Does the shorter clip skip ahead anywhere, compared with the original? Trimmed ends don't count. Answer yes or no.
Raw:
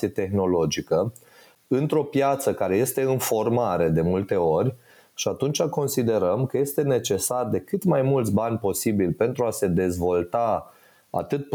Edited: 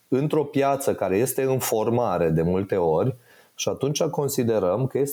no